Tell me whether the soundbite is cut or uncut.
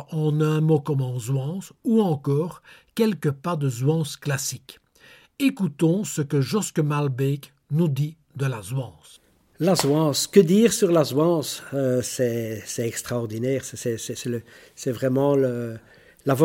uncut